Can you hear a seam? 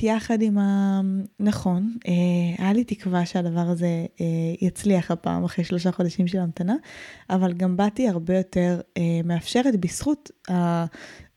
yes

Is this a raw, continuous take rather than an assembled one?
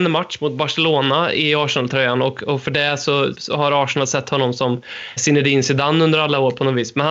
no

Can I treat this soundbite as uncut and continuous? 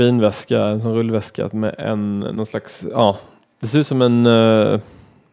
yes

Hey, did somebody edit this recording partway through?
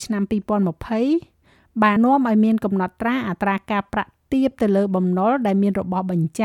yes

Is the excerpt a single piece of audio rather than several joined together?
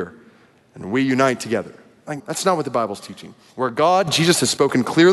no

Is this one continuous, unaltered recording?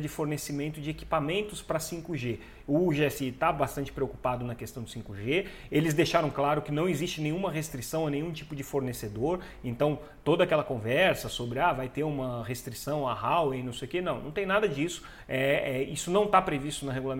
yes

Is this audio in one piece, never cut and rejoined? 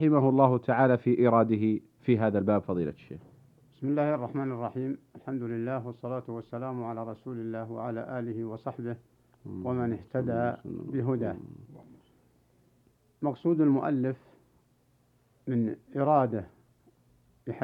yes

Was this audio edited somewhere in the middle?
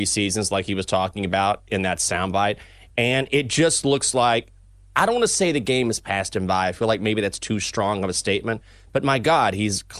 no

